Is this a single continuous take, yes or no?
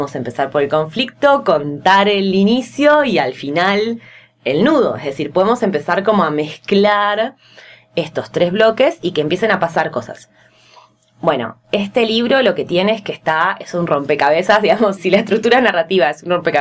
no